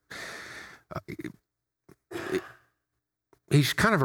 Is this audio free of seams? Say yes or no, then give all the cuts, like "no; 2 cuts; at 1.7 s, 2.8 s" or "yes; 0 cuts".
yes; 0 cuts